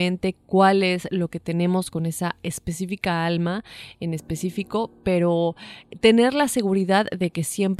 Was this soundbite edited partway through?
no; 0 cuts

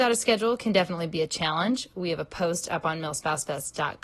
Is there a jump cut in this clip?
no; 0 cuts

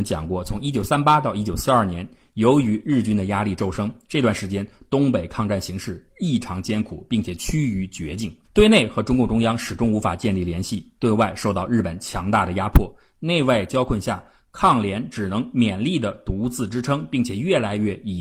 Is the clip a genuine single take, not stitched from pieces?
no; 1 cut; at 8.4 s

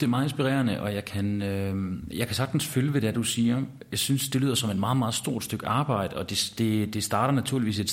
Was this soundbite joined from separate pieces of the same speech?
no; 0 cuts

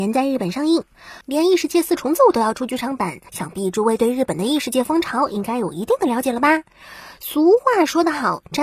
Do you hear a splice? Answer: yes; 2 cuts; at 1.2 s, 3.3 s

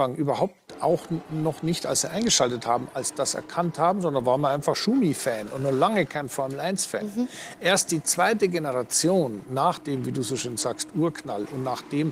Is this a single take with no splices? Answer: yes; 0 cuts

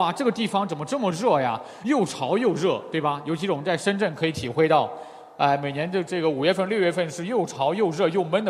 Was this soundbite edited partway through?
no; 0 cuts

